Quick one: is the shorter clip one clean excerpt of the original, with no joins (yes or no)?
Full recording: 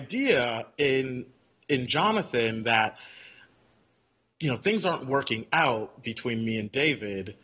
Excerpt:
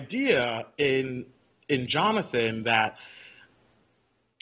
yes